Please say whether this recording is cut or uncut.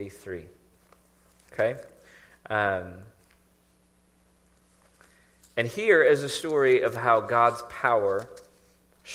uncut